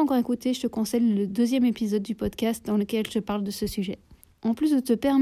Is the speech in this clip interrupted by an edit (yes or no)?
yes